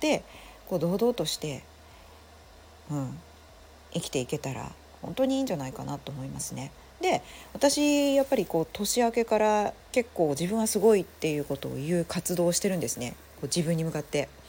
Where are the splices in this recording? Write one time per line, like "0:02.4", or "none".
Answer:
0:09.8